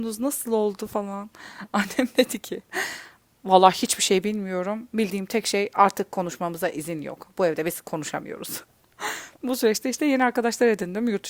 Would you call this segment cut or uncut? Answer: cut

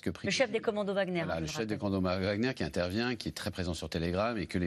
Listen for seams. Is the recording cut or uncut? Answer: uncut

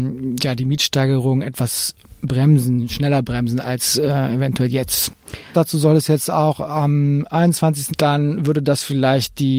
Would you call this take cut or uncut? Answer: cut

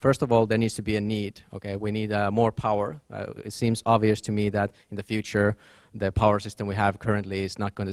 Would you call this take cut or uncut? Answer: uncut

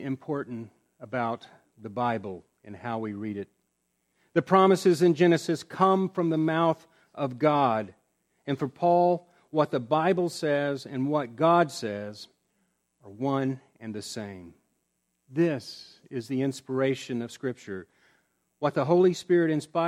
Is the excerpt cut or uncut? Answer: uncut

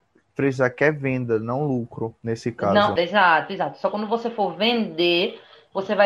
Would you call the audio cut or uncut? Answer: cut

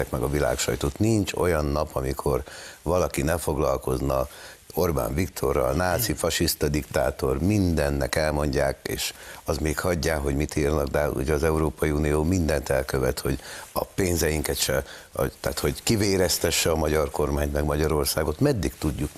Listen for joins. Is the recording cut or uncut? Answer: uncut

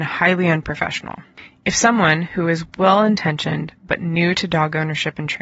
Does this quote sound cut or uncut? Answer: uncut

